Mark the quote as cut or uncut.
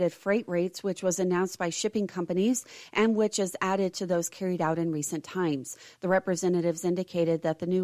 uncut